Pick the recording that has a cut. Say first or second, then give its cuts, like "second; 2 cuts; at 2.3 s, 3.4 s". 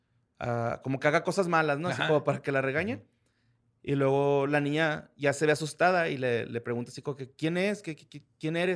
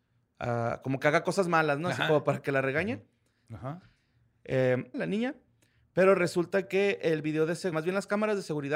second; 3 cuts; at 3.5 s, 4.9 s, 7.7 s